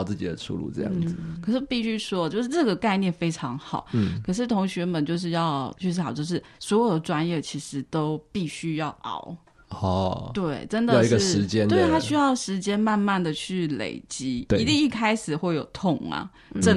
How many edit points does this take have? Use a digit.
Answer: 0